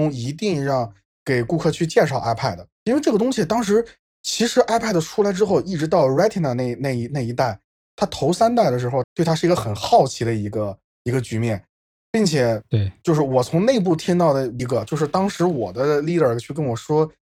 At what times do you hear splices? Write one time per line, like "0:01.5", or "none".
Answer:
0:09.0
0:14.6